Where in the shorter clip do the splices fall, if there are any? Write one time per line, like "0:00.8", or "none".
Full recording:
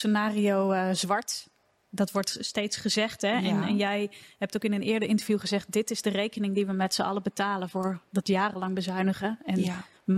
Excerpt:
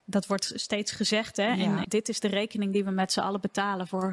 0:01.8

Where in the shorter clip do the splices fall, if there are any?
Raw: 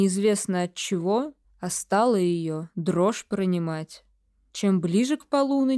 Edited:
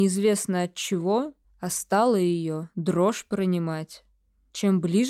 none

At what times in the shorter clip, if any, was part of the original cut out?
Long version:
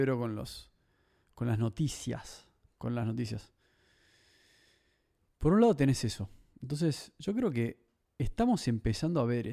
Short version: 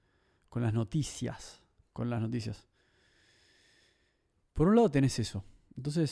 none

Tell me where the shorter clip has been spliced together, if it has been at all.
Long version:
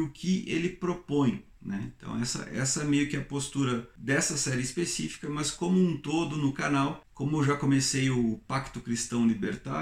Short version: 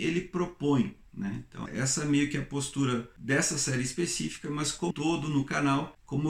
0:01.7
0:04.9

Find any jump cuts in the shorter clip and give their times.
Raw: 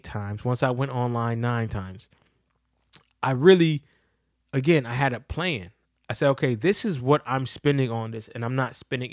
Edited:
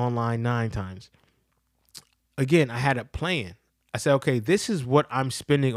0:02.2

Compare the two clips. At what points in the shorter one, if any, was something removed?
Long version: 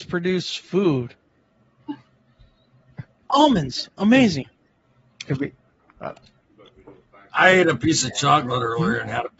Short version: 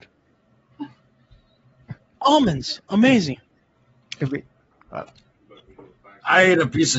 none

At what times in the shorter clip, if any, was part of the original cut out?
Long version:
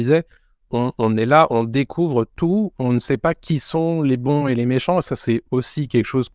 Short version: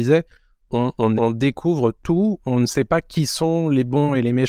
0:01.2

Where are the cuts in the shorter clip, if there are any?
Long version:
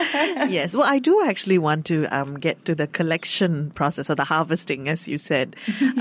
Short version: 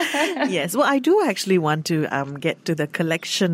none

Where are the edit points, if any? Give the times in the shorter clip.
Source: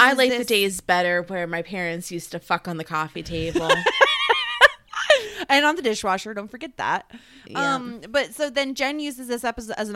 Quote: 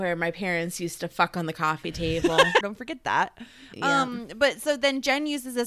0:02.6

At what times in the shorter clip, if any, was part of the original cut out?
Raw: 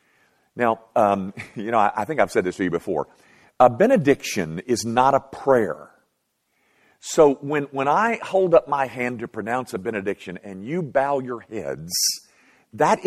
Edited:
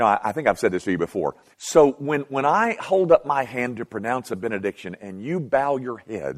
0:01.5

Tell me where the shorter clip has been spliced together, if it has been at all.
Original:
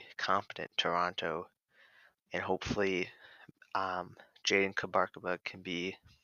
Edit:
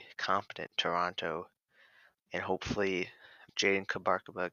0:03.5

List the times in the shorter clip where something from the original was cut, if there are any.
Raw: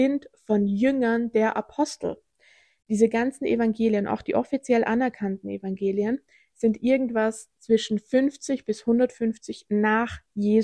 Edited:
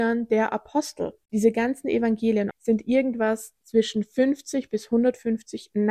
0:01.2
0:02.5

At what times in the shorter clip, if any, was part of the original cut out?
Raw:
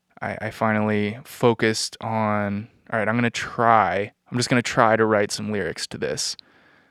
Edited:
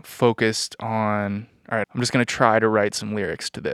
0:01.8

